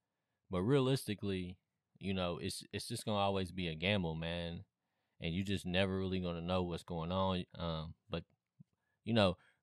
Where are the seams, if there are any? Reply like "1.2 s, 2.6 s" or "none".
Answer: 7.5 s